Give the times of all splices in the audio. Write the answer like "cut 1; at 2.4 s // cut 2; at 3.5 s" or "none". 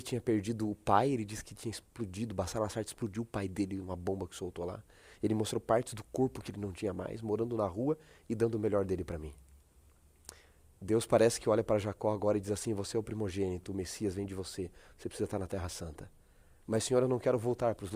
none

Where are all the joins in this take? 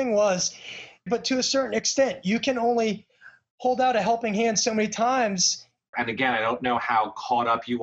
cut 1; at 1.1 s // cut 2; at 5.9 s

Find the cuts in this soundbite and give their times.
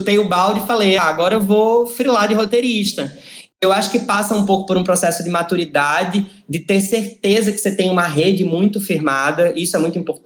cut 1; at 1.0 s

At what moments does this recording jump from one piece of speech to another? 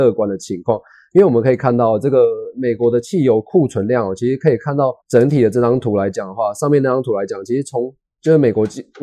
cut 1; at 5.0 s

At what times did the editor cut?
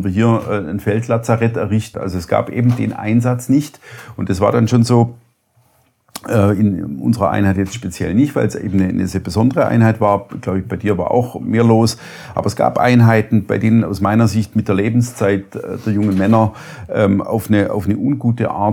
cut 1; at 1.9 s

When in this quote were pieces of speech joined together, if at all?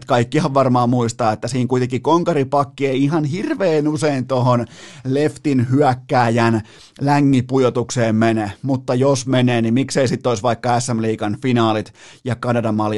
none

